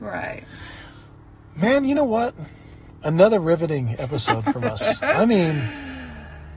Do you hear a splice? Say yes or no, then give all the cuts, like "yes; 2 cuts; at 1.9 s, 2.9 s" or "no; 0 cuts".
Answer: no; 0 cuts